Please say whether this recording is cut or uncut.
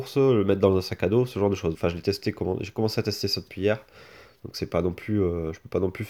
cut